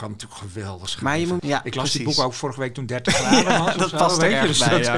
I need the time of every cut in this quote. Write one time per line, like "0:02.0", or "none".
0:01.4